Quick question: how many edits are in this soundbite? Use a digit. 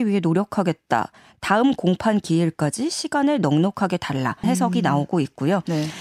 1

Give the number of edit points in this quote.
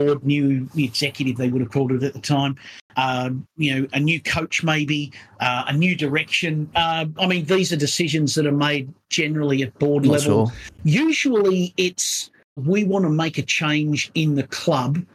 2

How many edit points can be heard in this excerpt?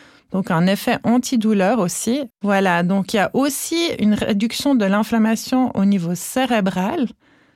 1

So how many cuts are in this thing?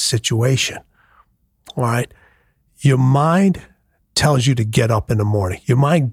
0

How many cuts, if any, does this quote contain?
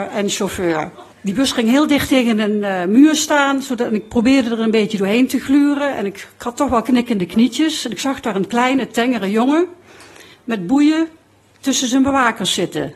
1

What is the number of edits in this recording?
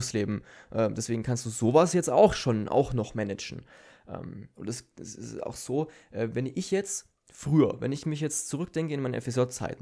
0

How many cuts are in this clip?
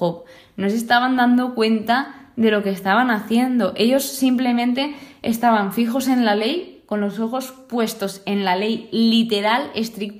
0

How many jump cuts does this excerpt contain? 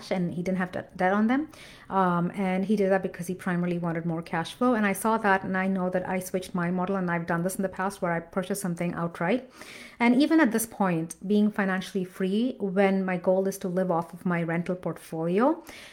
0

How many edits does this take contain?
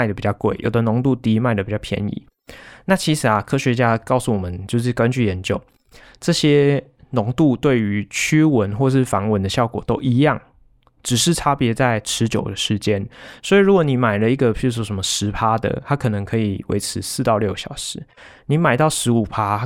0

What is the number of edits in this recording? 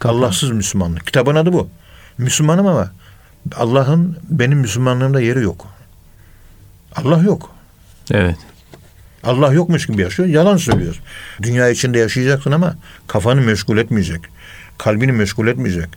1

